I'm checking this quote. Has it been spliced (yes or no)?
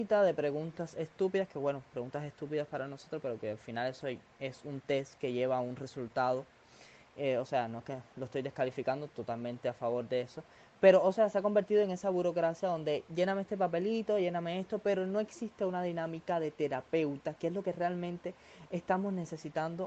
no